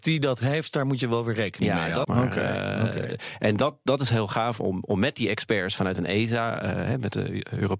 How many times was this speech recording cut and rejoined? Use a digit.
1